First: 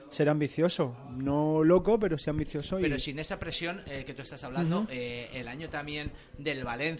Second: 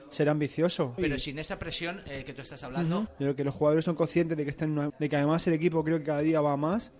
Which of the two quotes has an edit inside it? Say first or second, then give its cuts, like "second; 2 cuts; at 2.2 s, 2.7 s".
second; 3 cuts; at 1.0 s, 3.1 s, 4.9 s